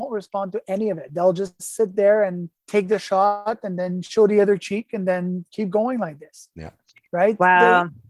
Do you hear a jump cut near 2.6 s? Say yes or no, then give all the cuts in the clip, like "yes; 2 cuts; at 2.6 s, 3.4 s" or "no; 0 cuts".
yes; 1 cut; at 2.6 s